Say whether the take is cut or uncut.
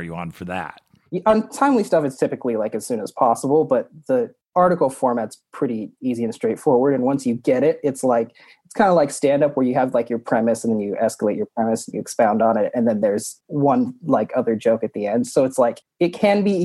uncut